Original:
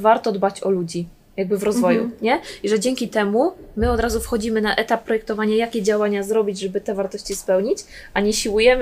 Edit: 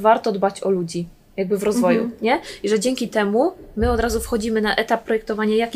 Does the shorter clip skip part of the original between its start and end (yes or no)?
no